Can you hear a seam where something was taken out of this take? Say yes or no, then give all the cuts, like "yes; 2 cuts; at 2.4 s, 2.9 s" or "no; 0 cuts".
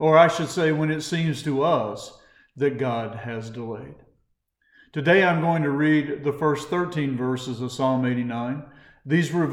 no; 0 cuts